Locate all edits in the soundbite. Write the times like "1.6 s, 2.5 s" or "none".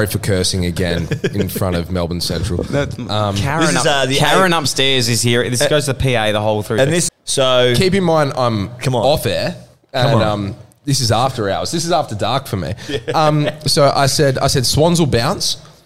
7.1 s